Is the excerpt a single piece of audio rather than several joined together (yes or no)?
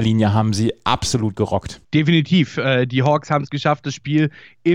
no